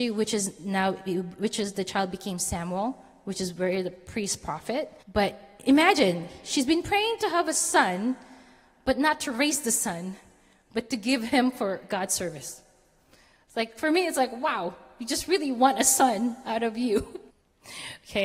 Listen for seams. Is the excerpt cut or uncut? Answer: cut